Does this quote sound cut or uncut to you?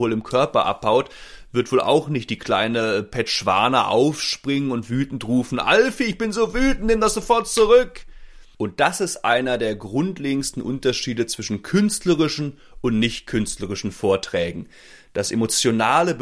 cut